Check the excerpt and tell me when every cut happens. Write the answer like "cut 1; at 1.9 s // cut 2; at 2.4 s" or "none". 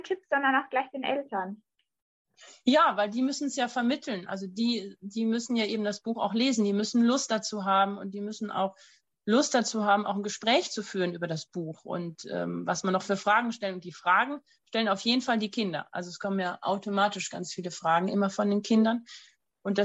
none